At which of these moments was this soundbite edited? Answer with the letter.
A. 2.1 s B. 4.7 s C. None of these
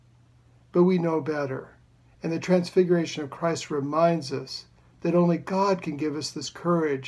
C